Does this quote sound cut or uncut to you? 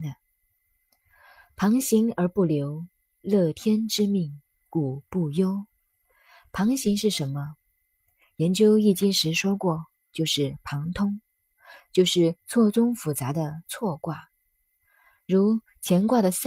uncut